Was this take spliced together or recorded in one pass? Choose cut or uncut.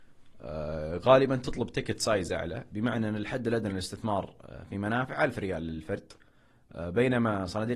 uncut